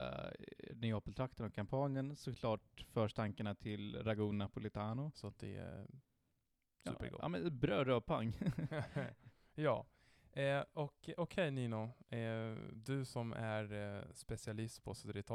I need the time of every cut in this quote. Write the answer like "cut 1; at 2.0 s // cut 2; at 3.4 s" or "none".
cut 1; at 5.1 s